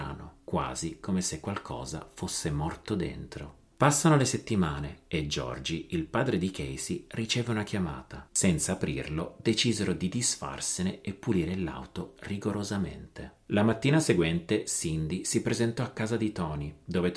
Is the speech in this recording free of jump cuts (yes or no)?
no